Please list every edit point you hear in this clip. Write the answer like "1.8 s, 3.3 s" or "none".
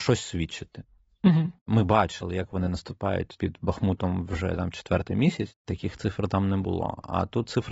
1.6 s